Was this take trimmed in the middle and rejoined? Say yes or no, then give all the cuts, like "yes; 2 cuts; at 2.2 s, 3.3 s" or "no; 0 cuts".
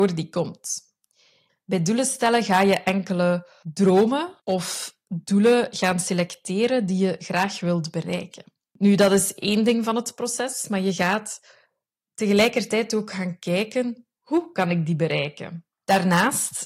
yes; 2 cuts; at 1.5 s, 15.7 s